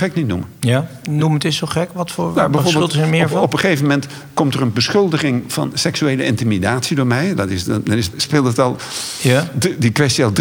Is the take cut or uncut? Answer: cut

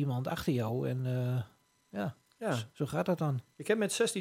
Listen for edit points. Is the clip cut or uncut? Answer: uncut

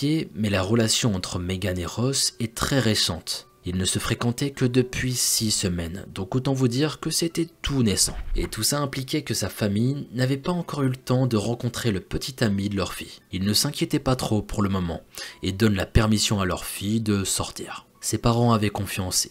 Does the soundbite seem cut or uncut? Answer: cut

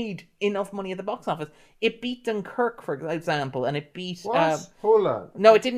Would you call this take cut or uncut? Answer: uncut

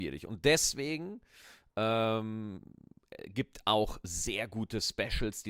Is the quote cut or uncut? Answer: uncut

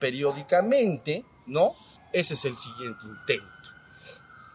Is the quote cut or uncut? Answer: cut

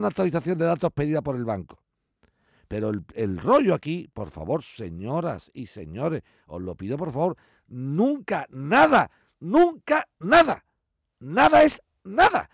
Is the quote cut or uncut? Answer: uncut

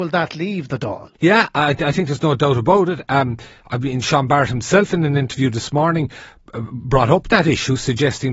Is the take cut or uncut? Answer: cut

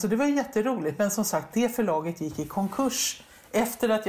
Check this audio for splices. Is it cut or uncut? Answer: uncut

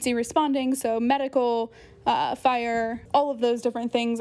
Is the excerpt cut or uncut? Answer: cut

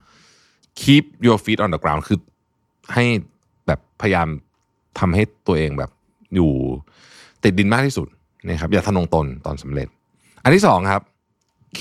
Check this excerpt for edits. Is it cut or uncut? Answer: cut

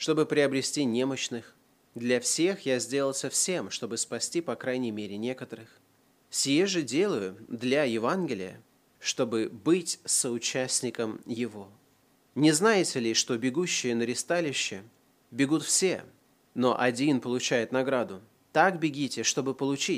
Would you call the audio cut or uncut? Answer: uncut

